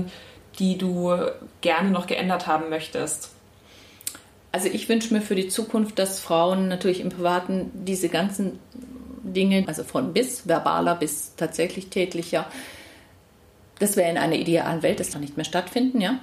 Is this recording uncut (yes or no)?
no